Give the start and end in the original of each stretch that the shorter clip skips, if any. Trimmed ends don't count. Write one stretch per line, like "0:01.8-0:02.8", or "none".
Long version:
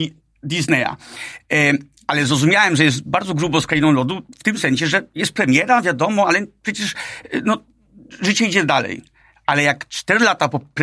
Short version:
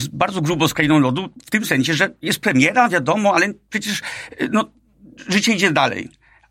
none